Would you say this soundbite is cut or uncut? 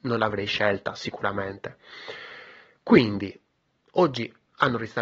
uncut